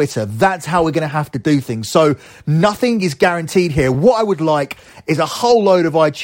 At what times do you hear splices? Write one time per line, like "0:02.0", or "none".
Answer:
none